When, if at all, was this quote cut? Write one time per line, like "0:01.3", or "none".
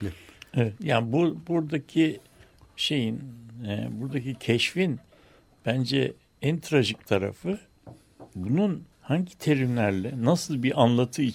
0:08.9